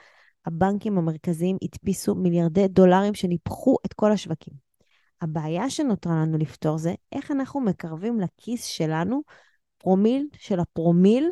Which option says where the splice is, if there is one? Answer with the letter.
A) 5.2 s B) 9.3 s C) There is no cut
C